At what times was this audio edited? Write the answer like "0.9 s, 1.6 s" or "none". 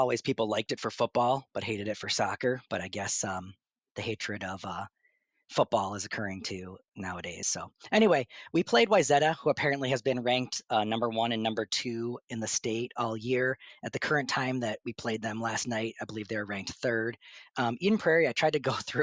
none